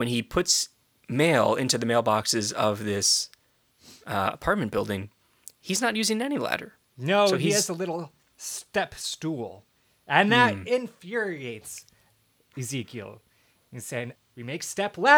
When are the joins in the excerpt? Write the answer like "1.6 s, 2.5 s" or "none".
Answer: 14.2 s